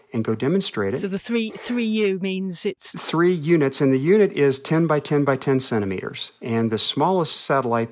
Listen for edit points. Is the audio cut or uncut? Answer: uncut